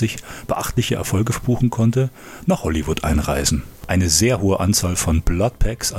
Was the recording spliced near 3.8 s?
yes; 1 cut; at 3.8 s

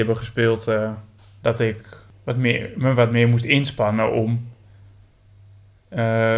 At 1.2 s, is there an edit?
yes; 1 cut; at 1.2 s

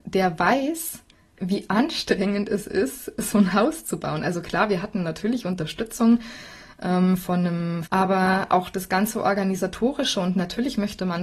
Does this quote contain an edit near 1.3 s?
no; 1 cut; at 7.9 s

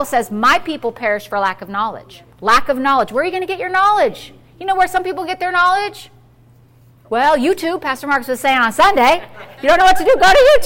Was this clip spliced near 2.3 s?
yes; 1 cut; at 2.3 s

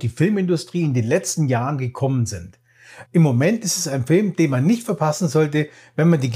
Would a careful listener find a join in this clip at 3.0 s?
yes; 1 cut; at 3.0 s

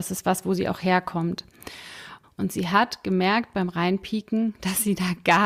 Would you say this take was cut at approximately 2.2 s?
yes; 1 cut; at 2.2 s

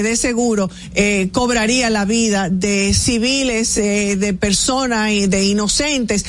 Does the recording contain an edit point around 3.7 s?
no; 0 cuts

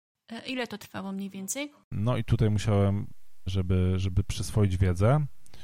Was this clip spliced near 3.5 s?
yes; 2 cuts; at 1.9 s, 3.5 s

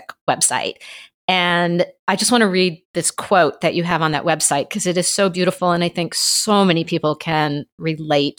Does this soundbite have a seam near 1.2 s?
no; 0 cuts

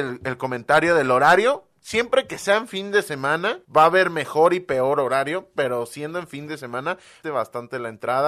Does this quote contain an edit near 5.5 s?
no; 2 cuts; at 3.6 s, 7.2 s

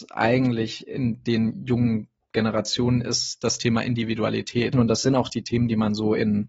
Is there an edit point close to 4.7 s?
yes; 1 cut; at 4.7 s

